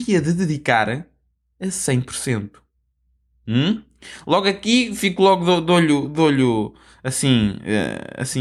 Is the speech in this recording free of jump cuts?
yes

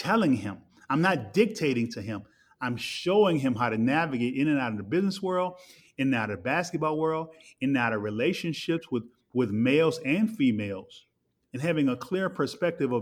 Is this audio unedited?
yes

